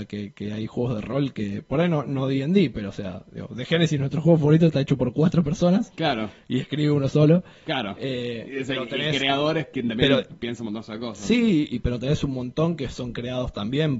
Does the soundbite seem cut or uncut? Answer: uncut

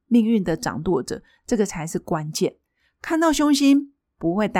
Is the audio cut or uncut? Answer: uncut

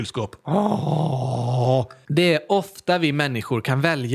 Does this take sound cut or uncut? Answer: uncut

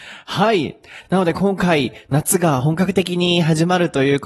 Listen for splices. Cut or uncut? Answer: uncut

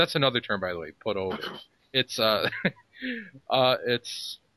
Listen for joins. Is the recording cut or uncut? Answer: uncut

